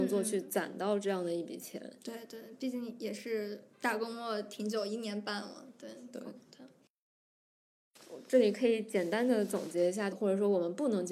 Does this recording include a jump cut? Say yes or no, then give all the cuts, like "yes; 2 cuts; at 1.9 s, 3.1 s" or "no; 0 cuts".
yes; 2 cuts; at 3.7 s, 10.1 s